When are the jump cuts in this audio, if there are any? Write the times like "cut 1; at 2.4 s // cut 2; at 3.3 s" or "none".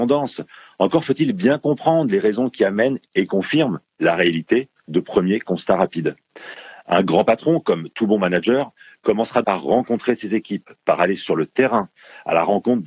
cut 1; at 9.4 s